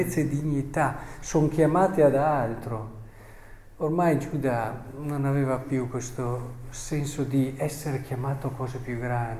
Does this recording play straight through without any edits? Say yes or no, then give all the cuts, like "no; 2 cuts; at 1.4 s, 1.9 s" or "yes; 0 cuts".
yes; 0 cuts